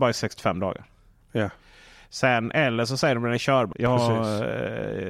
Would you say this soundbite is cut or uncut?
cut